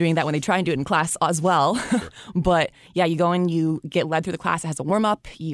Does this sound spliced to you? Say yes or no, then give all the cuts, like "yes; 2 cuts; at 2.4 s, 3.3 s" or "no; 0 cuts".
no; 0 cuts